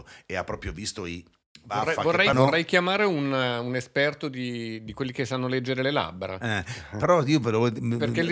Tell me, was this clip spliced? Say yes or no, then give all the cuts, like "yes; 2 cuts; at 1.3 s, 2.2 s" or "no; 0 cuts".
yes; 1 cut; at 2.3 s